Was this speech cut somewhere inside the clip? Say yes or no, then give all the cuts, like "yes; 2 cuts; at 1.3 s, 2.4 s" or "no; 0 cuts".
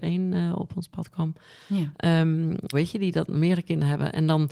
yes; 1 cut; at 2.7 s